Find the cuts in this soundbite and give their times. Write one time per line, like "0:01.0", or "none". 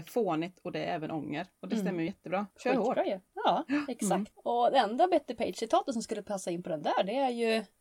none